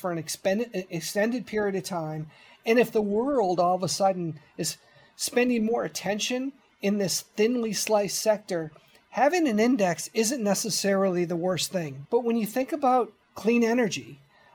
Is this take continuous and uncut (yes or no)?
no